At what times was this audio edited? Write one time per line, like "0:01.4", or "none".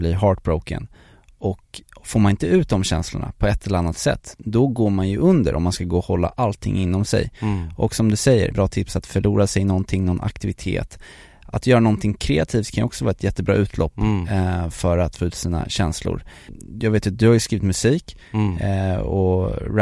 0:08.5